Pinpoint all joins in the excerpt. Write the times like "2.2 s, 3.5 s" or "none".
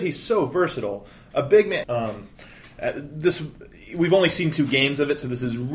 1.8 s